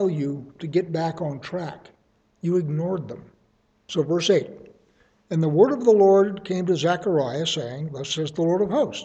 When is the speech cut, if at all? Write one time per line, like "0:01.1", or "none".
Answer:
0:03.7